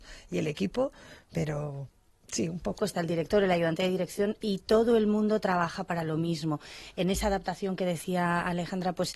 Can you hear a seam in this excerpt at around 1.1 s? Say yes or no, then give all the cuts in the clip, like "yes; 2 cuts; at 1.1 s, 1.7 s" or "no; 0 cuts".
no; 1 cut; at 2.8 s